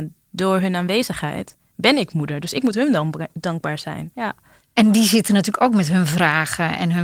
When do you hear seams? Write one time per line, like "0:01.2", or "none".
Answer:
0:04.1